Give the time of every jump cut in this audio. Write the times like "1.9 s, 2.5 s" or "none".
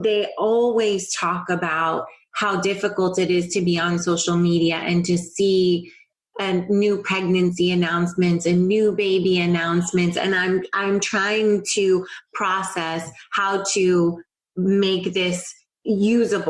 none